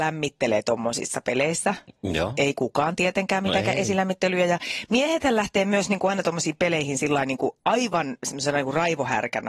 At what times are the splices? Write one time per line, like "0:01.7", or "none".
none